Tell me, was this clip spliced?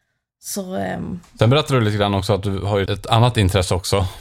yes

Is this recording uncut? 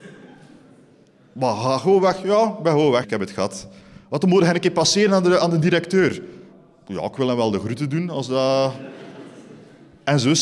no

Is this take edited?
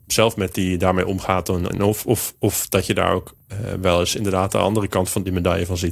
yes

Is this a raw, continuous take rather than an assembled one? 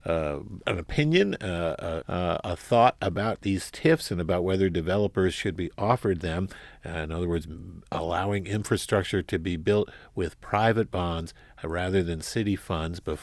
no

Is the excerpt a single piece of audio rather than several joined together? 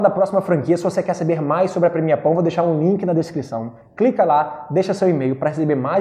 yes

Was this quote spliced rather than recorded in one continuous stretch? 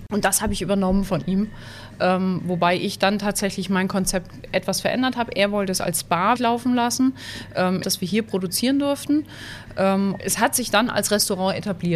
yes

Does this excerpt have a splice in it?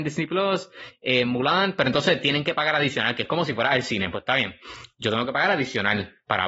no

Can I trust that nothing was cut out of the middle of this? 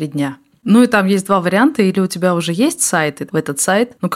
no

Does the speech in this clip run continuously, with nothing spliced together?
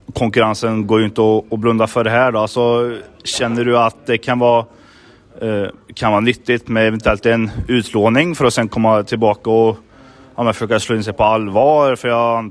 yes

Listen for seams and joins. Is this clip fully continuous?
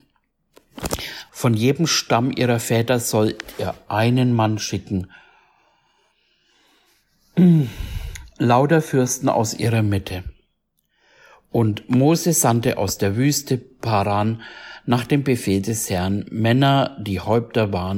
no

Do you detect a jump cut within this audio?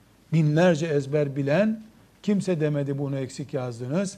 no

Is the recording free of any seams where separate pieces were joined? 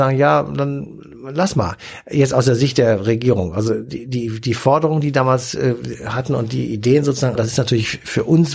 no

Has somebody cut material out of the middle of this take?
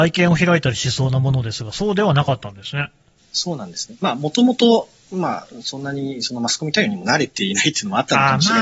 no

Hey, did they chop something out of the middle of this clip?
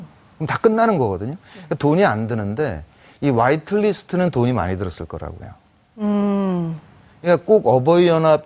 no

